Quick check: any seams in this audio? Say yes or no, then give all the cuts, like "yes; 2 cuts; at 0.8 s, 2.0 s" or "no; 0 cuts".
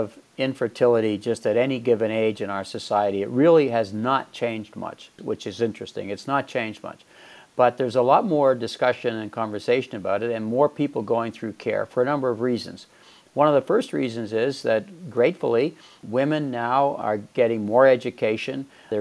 no; 0 cuts